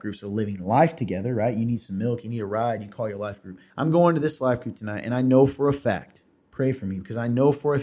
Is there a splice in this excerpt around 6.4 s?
no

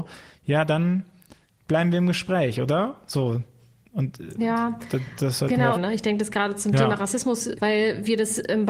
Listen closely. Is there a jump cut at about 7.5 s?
yes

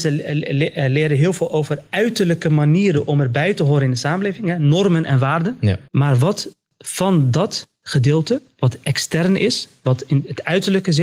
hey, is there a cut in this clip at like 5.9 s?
yes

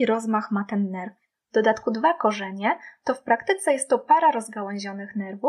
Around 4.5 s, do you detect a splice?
no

